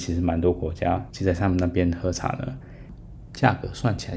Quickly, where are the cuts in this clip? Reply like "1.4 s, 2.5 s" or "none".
1.1 s